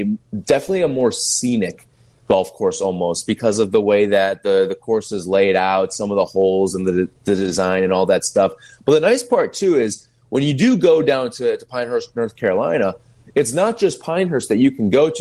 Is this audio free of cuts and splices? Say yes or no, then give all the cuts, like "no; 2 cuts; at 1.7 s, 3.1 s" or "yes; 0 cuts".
yes; 0 cuts